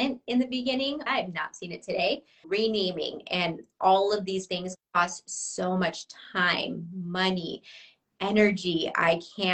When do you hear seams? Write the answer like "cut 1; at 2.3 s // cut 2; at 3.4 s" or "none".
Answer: cut 1; at 1.1 s // cut 2; at 2.4 s